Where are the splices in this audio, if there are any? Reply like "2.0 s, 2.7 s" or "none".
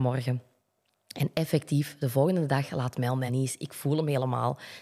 3.3 s